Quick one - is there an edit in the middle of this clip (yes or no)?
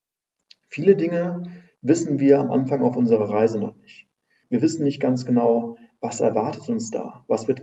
yes